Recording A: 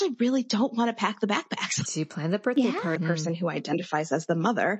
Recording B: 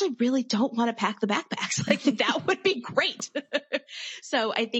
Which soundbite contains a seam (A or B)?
A